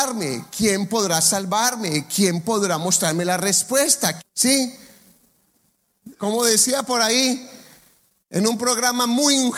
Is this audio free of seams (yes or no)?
no